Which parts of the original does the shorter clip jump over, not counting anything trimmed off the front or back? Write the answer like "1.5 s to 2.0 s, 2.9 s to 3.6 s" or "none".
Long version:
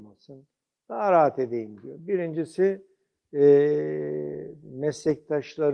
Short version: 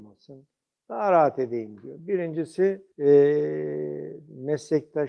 2.9 s to 3.3 s